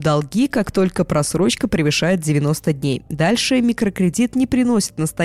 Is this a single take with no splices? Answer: yes; 0 cuts

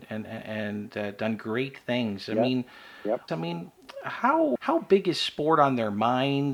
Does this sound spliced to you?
yes; 2 cuts; at 3.3 s, 4.6 s

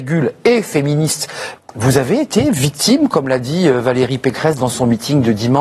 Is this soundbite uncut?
no; 1 cut; at 1.6 s

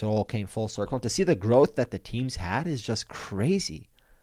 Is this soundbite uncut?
yes; 0 cuts

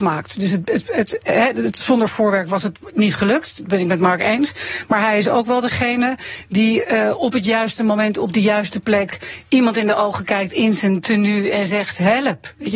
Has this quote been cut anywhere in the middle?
no; 0 cuts

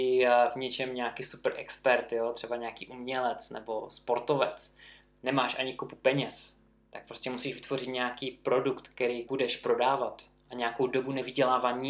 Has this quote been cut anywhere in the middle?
yes; 1 cut; at 9.3 s

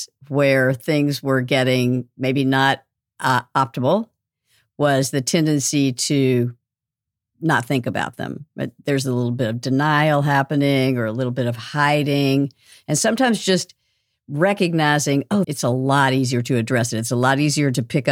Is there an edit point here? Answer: yes; 1 cut; at 15.4 s

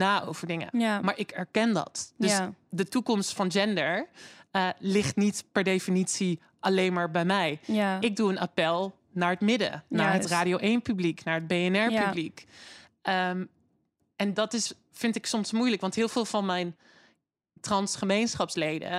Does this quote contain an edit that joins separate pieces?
no; 0 cuts

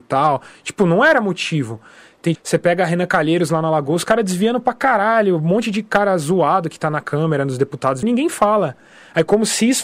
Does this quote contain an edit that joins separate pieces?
yes; 2 cuts; at 2.4 s, 8.0 s

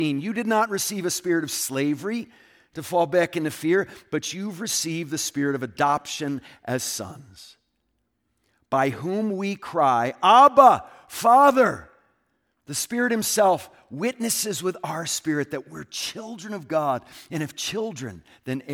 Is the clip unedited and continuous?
yes; 0 cuts

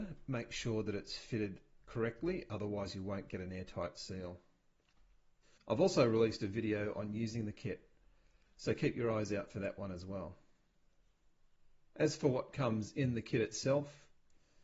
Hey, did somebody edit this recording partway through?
yes; 1 cut; at 5.6 s

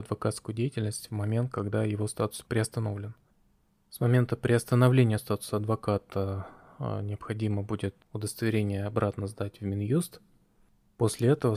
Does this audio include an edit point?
no; 0 cuts

